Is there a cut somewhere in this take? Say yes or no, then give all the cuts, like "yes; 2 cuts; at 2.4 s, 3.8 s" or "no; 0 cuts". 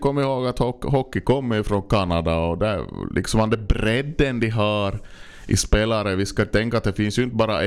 no; 0 cuts